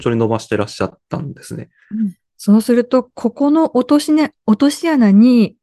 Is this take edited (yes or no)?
yes